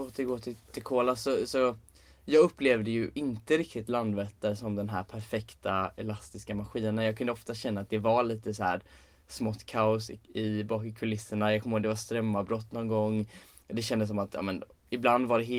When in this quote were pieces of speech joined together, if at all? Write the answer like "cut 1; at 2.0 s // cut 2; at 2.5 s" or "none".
none